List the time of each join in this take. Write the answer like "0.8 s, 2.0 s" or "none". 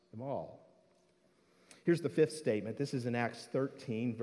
none